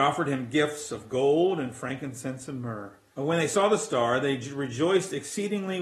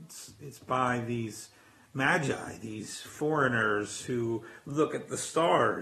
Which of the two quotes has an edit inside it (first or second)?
first